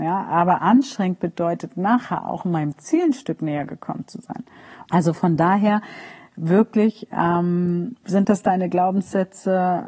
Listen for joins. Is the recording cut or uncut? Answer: cut